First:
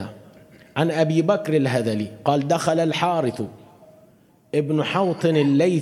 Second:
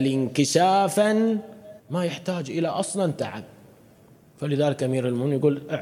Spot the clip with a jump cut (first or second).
second